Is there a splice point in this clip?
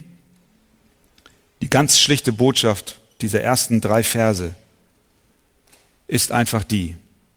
no; 0 cuts

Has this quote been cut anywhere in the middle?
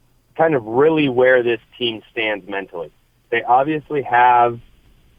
no; 0 cuts

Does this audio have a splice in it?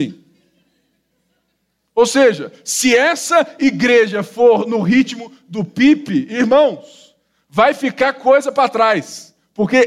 no; 0 cuts

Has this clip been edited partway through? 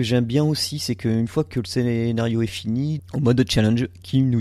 yes; 1 cut; at 3.0 s

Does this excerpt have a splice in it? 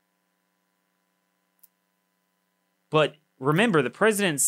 yes; 1 cut; at 2.7 s

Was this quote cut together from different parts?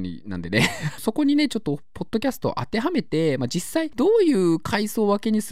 yes; 1 cut; at 1.0 s

